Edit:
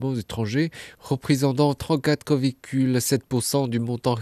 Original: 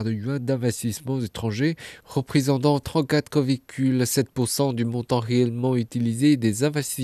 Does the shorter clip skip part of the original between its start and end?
no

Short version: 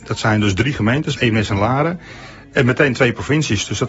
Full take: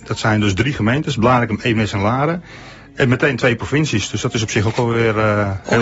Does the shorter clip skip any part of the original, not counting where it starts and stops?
yes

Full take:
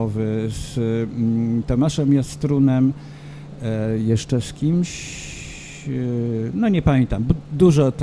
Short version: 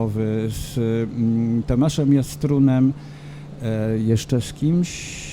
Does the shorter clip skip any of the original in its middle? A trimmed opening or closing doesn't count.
no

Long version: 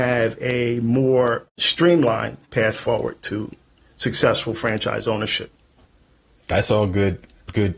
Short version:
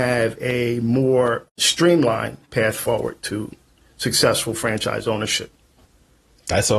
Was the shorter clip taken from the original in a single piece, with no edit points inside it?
yes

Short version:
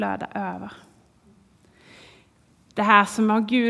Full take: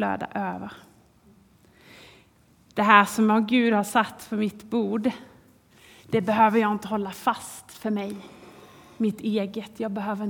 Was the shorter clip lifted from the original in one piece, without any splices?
yes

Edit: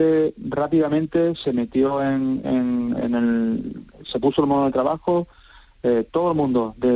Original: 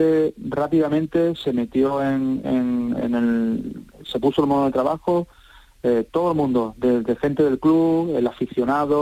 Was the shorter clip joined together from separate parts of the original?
no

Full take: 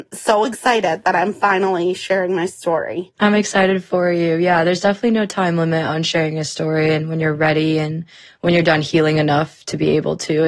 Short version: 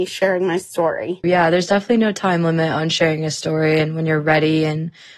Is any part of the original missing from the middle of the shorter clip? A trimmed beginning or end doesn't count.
yes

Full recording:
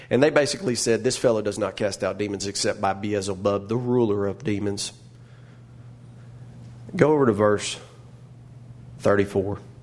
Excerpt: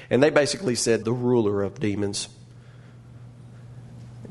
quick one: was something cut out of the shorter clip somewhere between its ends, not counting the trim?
yes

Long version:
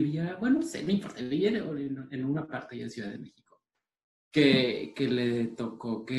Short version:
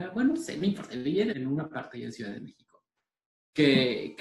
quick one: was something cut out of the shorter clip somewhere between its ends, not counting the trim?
yes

